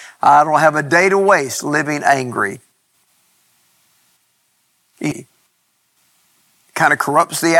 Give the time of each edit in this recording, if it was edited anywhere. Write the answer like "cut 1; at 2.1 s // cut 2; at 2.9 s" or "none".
cut 1; at 5.1 s